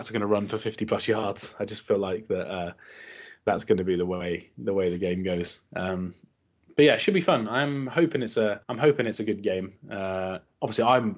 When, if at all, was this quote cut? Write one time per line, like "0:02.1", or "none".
0:08.6